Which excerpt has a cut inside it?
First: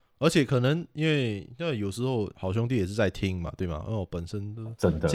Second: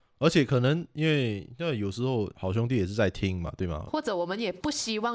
second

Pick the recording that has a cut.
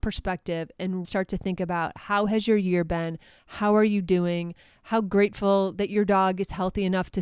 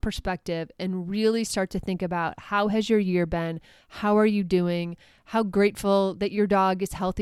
first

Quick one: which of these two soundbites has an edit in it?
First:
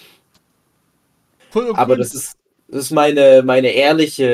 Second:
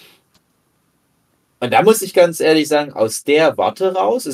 first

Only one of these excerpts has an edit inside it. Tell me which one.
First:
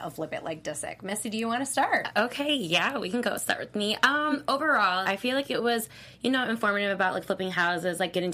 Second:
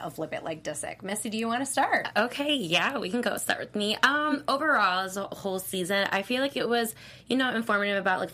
first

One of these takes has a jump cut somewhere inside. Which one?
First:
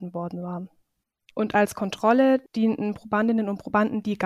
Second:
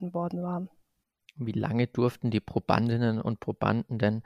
first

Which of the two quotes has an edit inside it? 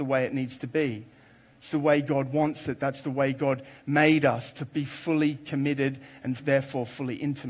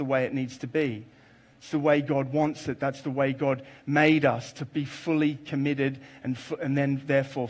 first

